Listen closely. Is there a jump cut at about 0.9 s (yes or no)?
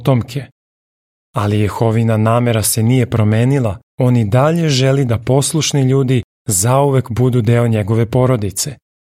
no